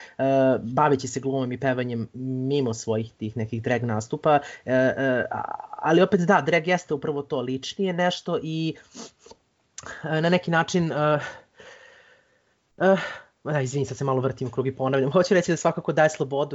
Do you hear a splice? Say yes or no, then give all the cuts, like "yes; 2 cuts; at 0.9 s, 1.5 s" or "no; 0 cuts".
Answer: no; 0 cuts